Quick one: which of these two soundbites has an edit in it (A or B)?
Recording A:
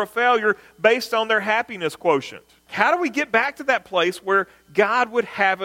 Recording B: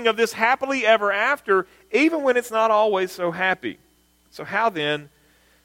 A